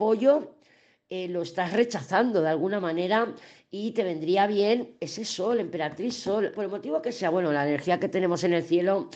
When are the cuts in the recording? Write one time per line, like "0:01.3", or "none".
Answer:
0:06.5